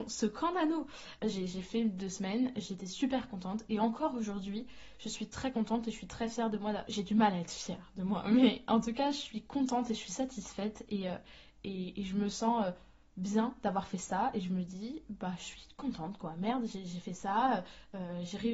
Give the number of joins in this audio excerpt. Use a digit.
2